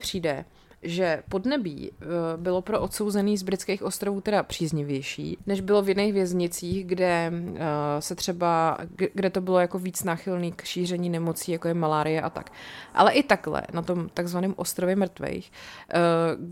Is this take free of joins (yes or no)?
yes